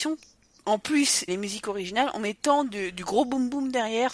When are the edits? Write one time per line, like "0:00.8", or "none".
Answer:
0:01.3